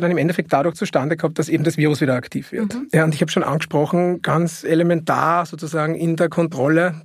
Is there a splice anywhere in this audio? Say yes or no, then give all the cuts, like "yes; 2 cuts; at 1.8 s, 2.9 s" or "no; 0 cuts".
no; 0 cuts